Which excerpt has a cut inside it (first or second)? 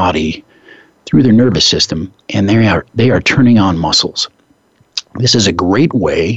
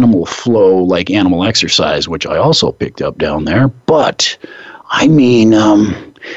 first